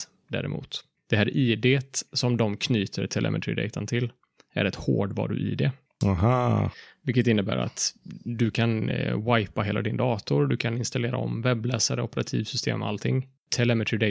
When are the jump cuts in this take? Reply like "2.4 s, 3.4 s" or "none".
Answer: none